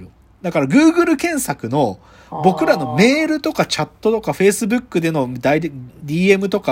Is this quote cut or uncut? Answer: uncut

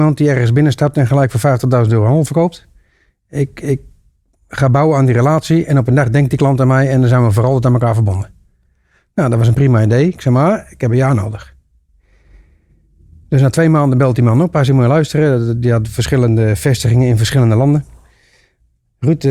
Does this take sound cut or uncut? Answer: uncut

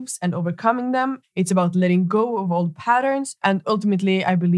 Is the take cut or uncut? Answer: cut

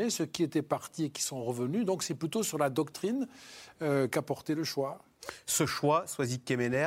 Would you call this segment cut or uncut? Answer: uncut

